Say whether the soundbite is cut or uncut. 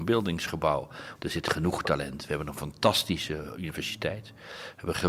cut